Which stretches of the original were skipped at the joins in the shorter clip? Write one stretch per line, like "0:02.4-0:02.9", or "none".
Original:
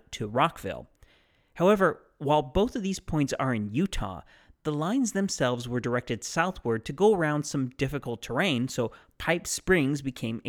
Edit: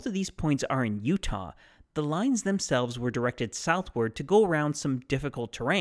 none